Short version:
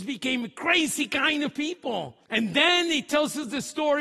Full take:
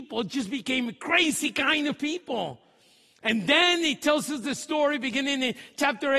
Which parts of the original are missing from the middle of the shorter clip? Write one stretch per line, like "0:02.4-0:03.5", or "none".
0:02.7-0:03.2